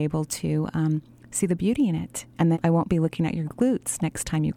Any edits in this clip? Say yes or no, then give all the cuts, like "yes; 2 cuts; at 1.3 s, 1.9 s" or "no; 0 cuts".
yes; 1 cut; at 2.5 s